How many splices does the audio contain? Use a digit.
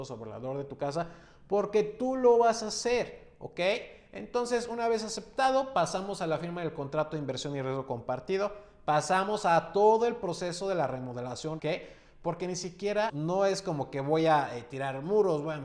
2